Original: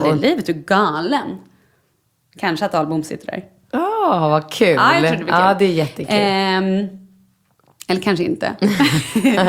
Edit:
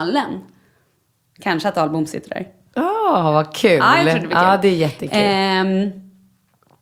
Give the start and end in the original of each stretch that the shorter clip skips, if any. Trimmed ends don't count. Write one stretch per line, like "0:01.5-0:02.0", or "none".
none